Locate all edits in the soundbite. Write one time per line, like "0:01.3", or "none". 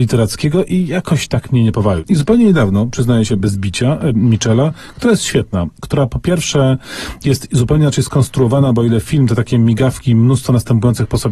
0:04.1